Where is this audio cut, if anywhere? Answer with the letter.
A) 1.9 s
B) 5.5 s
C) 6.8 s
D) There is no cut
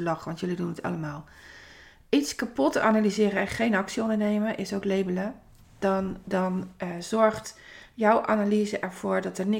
D